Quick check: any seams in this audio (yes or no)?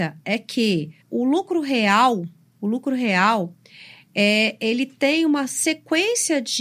yes